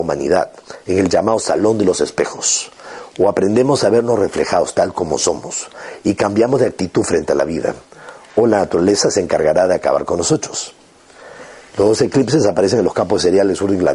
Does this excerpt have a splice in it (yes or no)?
no